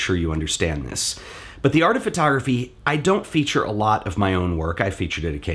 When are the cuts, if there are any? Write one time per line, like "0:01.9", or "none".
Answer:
none